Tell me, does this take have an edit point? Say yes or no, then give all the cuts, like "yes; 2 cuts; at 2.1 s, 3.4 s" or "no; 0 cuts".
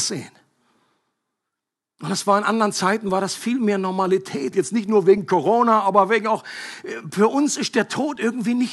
yes; 1 cut; at 4.5 s